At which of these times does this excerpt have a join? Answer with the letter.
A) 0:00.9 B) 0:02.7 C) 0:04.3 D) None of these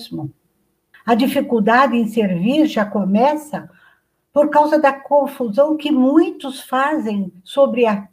A